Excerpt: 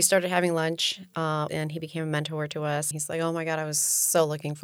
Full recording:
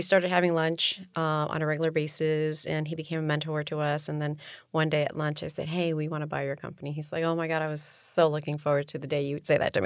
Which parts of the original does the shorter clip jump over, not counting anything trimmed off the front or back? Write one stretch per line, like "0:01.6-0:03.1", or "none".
0:01.5-0:02.6
0:04.1-0:06.9